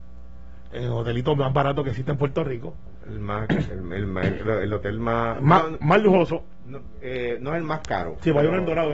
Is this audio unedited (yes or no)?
yes